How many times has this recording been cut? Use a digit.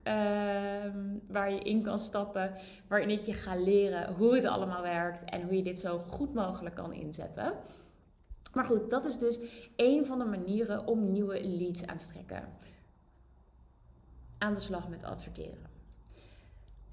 0